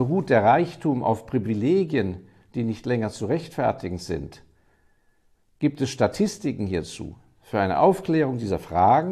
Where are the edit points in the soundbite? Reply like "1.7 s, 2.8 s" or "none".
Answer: none